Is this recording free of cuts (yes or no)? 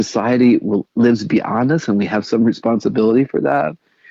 yes